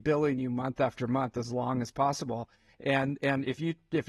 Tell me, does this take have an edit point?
no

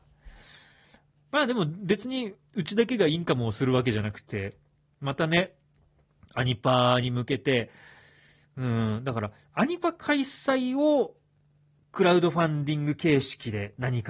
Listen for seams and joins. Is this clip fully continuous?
yes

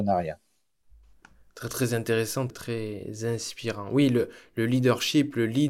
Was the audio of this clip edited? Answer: yes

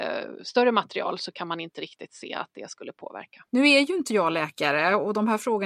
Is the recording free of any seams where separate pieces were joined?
no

